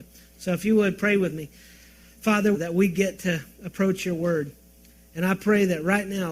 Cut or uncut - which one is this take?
cut